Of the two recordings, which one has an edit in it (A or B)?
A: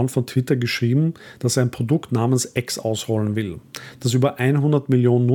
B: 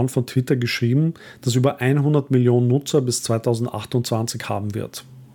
B